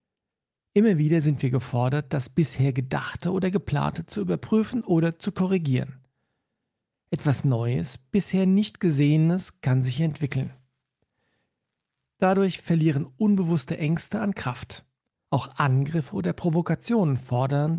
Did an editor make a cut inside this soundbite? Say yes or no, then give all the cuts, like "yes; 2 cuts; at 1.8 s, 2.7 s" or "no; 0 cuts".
yes; 2 cuts; at 12.2 s, 15.3 s